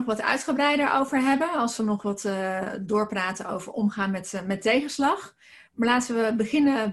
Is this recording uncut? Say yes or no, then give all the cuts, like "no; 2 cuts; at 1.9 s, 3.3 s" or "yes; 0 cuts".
yes; 0 cuts